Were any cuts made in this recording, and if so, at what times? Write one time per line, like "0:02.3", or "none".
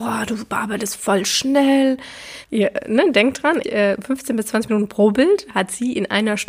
0:02.4
0:03.6